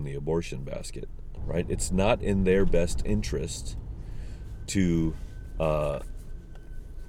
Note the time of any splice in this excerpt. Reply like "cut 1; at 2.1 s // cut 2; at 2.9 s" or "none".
cut 1; at 1.4 s